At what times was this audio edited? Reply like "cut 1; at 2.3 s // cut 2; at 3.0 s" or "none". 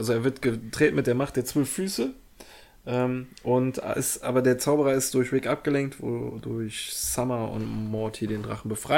none